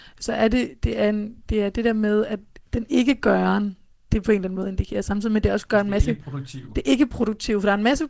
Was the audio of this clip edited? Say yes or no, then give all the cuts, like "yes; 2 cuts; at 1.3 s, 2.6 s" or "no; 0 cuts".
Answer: no; 0 cuts